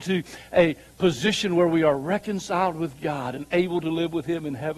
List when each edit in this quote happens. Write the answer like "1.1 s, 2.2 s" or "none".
none